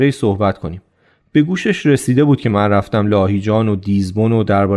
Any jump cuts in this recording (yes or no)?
no